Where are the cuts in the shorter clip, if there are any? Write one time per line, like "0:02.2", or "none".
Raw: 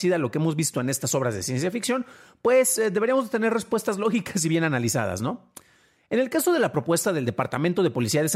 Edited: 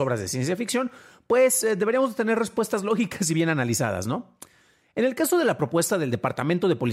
none

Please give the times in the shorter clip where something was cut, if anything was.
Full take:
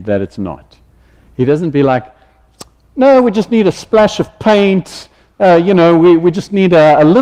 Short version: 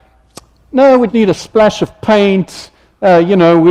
0:01.1

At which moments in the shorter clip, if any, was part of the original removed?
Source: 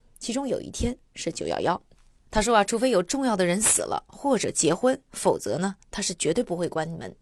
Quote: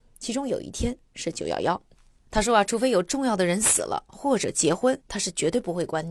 0:05.0

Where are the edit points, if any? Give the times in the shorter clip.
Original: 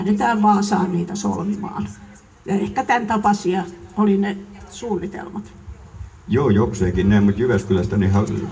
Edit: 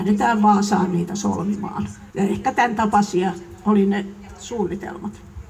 0:02.1

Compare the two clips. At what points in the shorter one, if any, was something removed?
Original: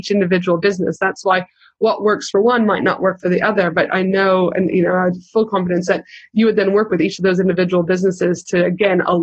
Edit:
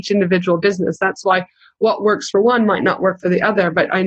none

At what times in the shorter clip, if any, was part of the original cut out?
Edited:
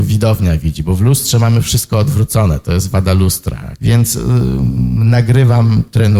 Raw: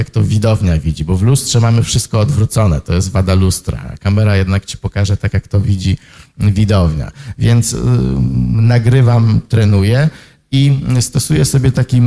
0:03.8

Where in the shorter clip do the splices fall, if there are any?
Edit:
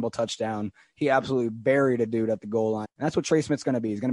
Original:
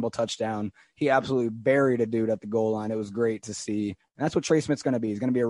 0:02.8

